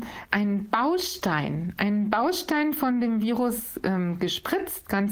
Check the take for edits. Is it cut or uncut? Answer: uncut